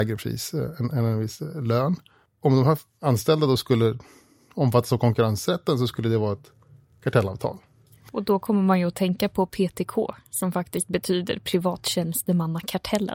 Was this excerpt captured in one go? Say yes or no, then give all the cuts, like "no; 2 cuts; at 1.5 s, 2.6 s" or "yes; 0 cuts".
yes; 0 cuts